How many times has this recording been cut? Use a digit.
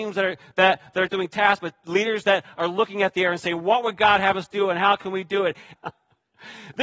2